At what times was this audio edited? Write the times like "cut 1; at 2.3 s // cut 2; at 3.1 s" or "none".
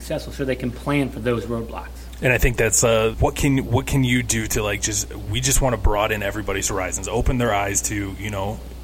cut 1; at 3.1 s